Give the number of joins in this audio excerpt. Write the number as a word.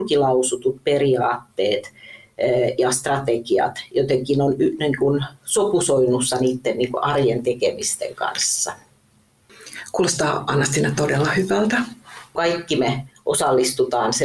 one